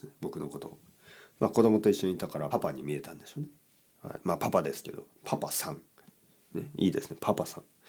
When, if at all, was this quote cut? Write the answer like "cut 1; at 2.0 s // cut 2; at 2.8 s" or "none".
cut 1; at 2.5 s